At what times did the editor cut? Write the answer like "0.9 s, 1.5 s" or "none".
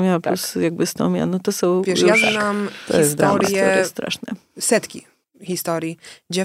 none